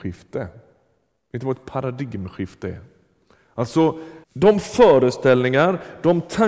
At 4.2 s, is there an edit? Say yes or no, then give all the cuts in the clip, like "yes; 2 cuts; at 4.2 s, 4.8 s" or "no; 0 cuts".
yes; 1 cut; at 4.2 s